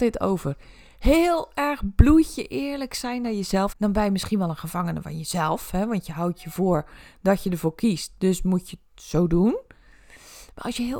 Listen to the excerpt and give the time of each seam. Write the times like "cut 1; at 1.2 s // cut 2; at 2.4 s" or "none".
cut 1; at 3.7 s